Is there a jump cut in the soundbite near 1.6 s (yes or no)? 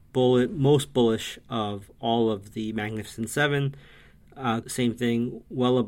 no